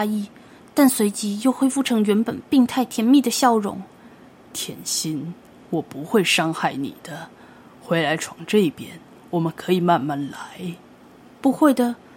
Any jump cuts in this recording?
no; 0 cuts

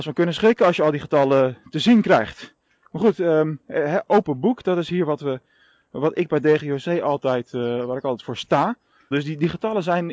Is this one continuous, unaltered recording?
no; 1 cut; at 9.1 s

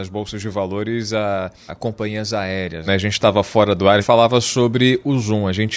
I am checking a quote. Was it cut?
yes; 3 cuts; at 1.7 s, 2.9 s, 4.0 s

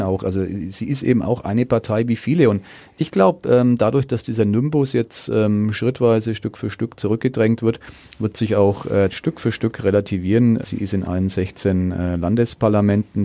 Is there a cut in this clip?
yes; 2 cuts; at 9.1 s, 10.6 s

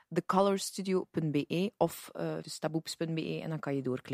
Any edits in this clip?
yes; 1 cut; at 2.4 s

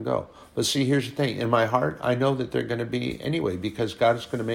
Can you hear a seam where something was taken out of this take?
no; 0 cuts

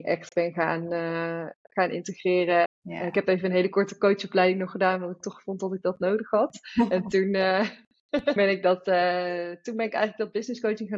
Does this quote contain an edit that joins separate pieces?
yes; 2 cuts; at 2.6 s, 8.4 s

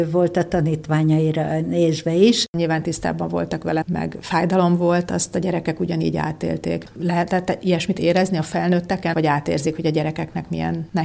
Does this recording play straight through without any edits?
no; 2 cuts; at 3.8 s, 9.1 s

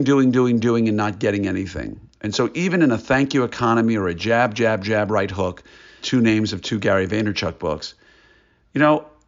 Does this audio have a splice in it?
yes; 1 cut; at 6.0 s

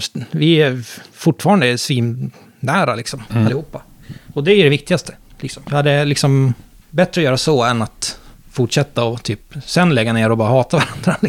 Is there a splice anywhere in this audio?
no; 0 cuts

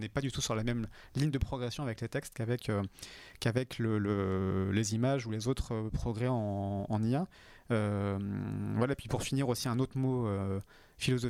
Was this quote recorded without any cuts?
yes; 0 cuts

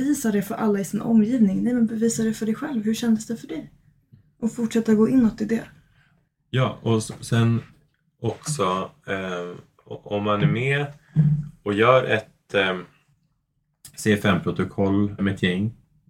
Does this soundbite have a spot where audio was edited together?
yes; 1 cut; at 15.2 s

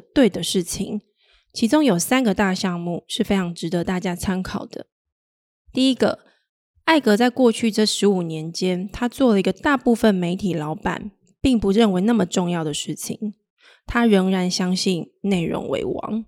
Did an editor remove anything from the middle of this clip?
no; 0 cuts

